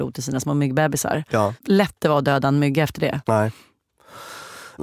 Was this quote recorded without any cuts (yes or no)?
yes